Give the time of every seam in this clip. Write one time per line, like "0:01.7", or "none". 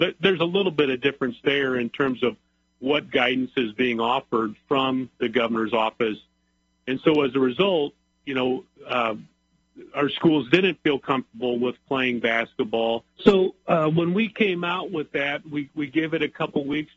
0:13.2